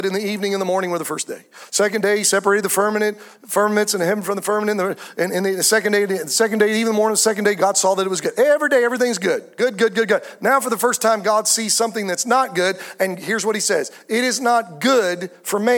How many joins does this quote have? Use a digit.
1